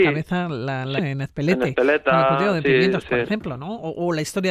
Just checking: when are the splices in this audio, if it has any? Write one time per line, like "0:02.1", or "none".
0:01.0